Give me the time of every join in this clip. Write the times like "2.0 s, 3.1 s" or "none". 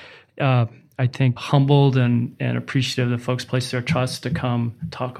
1.4 s